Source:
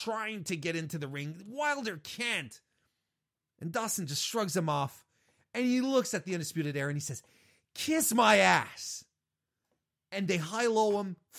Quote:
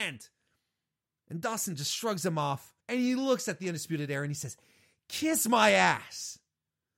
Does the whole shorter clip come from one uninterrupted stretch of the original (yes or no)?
no